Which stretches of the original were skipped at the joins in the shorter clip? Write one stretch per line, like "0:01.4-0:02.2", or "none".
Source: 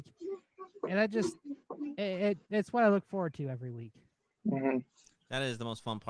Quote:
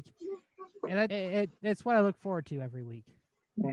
0:01.1-0:02.0